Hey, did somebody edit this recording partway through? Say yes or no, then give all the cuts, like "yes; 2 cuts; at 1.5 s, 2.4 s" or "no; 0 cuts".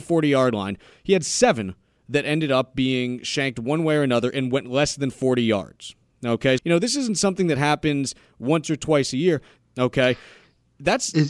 yes; 2 cuts; at 6.6 s, 9.6 s